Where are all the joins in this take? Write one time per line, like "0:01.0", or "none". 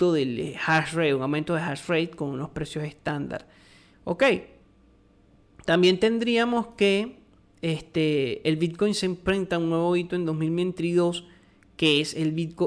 0:03.9